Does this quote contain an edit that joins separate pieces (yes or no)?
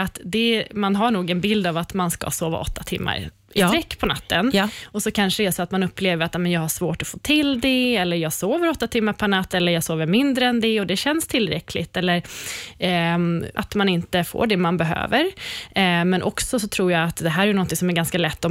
yes